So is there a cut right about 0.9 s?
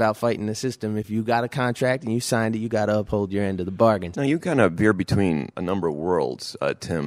no; 2 cuts; at 4.1 s, 5.5 s

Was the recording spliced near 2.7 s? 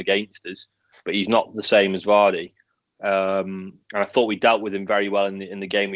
no; 0 cuts

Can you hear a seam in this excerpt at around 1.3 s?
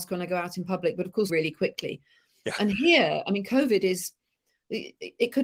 yes; 1 cut; at 1.3 s

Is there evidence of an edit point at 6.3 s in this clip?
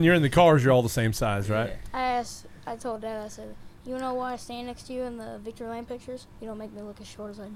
yes; 1 cut; at 6.3 s

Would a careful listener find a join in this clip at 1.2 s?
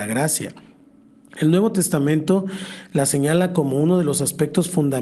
no; 0 cuts

